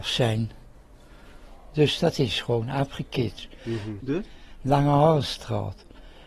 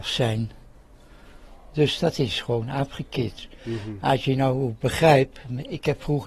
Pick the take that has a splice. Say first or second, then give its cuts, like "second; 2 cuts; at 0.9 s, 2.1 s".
first; 1 cut; at 4.0 s